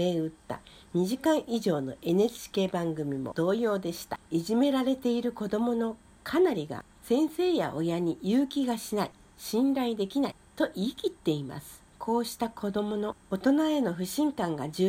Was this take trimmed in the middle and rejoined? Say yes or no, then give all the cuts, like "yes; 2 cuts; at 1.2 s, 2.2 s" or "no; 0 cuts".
yes; 2 cuts; at 4.2 s, 11.9 s